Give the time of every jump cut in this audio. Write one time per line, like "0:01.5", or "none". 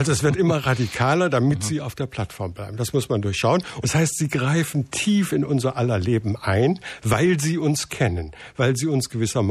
0:03.8